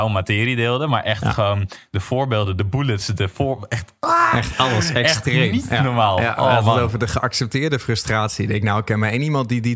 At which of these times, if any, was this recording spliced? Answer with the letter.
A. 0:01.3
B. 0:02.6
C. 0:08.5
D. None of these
D